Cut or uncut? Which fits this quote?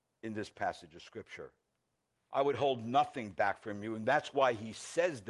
cut